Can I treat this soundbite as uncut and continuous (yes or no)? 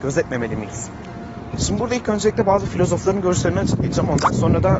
no